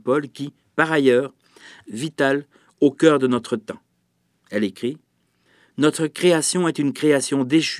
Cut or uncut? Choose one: cut